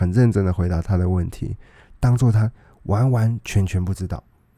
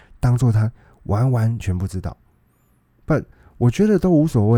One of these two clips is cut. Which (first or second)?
second